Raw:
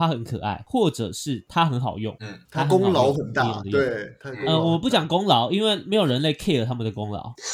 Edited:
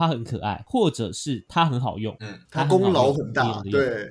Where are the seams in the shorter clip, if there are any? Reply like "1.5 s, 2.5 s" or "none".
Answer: none